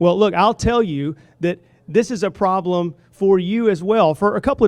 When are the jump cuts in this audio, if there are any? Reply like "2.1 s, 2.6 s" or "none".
none